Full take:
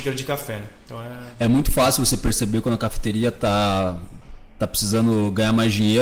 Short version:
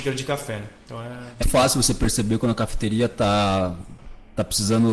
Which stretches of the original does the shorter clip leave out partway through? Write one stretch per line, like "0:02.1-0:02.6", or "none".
0:01.4-0:01.6